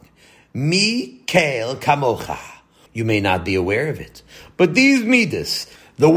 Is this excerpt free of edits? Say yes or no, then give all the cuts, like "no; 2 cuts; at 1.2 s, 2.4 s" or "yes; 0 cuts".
no; 1 cut; at 2.9 s